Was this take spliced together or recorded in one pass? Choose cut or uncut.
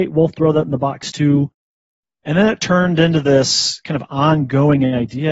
uncut